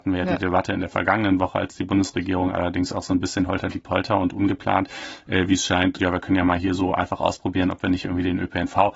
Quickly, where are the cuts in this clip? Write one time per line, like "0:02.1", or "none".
0:06.0